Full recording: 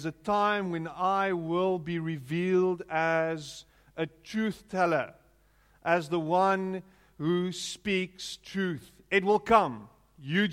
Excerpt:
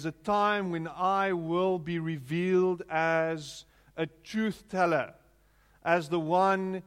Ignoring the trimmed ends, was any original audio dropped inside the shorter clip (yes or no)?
no